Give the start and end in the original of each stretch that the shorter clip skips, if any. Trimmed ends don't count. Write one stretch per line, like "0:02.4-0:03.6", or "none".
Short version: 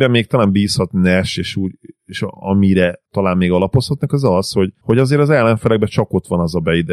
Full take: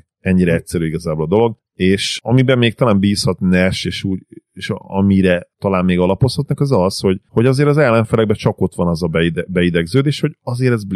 none

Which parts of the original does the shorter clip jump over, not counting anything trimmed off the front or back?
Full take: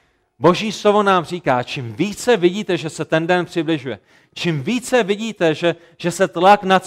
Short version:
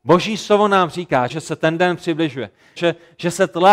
0:01.6-0:02.8
0:04.3-0:05.6

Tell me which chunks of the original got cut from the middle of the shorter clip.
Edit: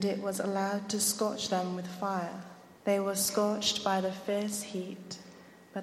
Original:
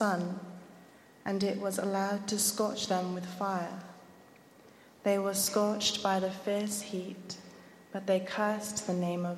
0:04.2-0:05.0

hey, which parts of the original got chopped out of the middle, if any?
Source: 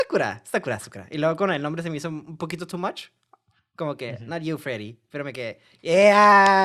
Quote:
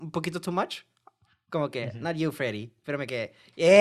none

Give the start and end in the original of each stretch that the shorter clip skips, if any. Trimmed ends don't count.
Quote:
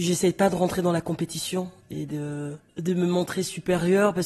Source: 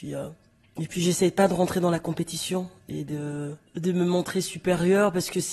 none

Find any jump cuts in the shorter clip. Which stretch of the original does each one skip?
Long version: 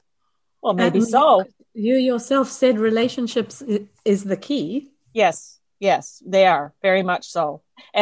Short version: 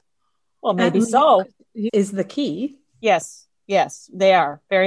0:01.9-0:04.0

